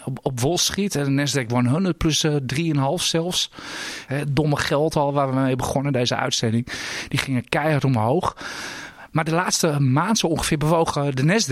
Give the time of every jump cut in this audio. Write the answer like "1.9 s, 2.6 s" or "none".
4.1 s